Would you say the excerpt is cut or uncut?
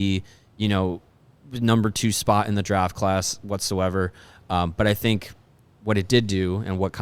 uncut